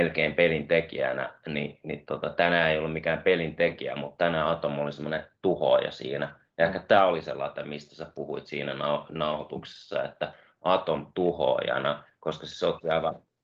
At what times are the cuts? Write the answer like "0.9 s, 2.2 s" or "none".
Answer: none